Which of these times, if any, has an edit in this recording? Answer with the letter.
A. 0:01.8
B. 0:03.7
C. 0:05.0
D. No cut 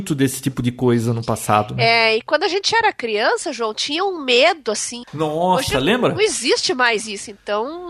C